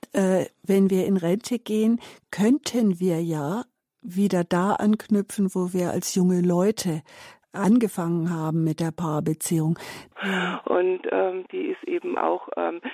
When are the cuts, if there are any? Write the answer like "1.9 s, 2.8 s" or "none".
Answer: 10.1 s, 11.5 s